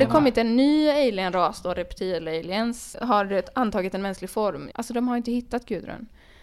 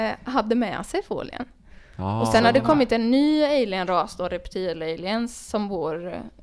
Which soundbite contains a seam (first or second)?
first